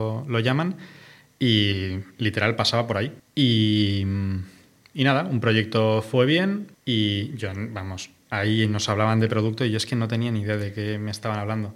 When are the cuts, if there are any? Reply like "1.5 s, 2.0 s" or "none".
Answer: 3.2 s, 6.7 s